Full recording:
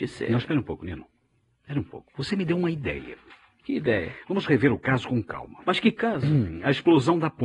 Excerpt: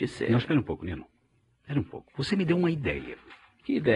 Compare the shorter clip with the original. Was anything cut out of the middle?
no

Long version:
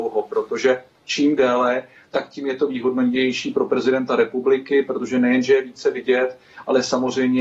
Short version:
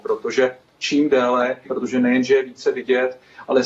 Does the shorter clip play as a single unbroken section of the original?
no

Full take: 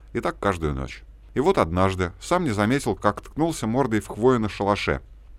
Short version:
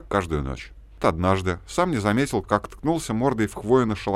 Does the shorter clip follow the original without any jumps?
no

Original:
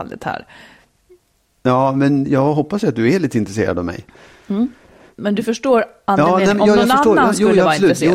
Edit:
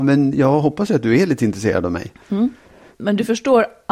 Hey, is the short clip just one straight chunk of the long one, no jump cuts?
no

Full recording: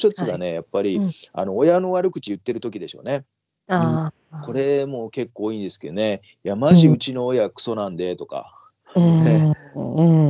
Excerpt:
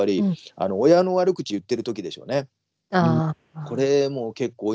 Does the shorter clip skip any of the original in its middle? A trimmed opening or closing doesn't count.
no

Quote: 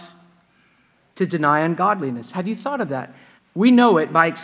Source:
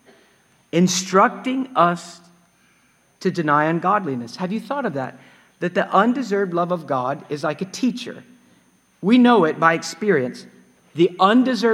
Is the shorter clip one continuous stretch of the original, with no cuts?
no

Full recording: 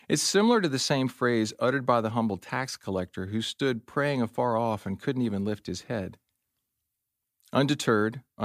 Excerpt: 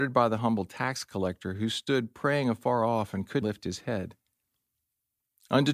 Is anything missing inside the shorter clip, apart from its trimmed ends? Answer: yes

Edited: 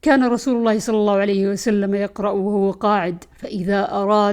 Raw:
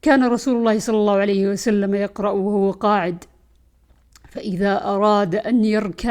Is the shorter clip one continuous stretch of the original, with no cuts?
no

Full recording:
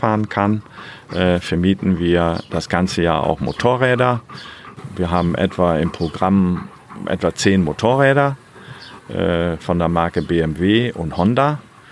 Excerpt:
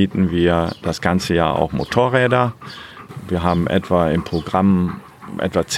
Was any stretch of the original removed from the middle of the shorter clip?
no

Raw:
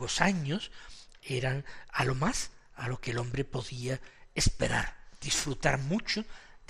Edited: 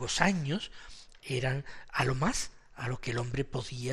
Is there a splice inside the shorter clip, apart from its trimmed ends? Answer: no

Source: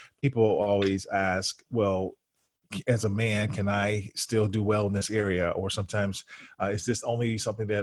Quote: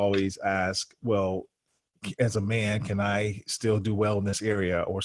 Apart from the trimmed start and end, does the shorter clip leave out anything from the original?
no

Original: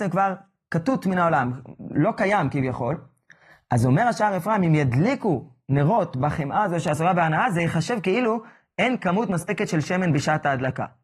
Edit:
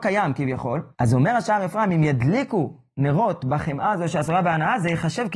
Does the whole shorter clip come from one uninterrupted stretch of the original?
no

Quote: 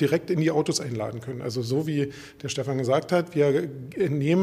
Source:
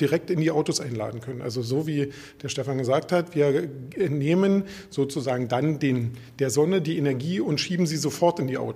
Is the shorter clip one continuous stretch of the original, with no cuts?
yes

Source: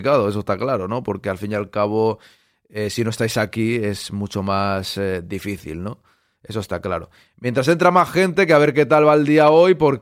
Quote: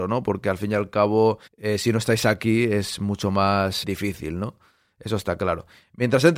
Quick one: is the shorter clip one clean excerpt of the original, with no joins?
no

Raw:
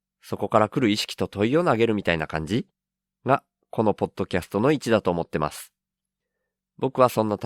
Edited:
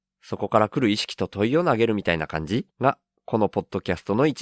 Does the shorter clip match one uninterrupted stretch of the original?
no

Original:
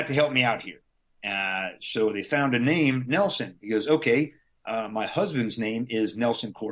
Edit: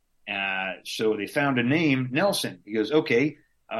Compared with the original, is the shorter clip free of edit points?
yes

